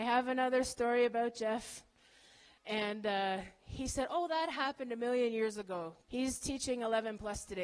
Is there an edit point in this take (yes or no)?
yes